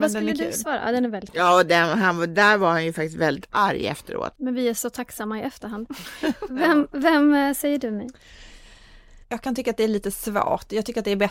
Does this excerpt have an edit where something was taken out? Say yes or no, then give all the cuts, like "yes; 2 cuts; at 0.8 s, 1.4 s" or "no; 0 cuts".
yes; 2 cuts; at 4.3 s, 9.2 s